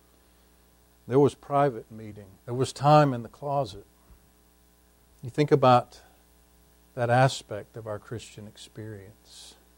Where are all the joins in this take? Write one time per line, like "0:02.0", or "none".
0:02.4
0:05.1